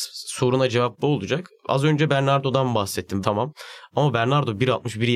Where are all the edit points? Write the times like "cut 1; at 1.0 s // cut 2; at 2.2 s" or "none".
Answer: cut 1; at 3.2 s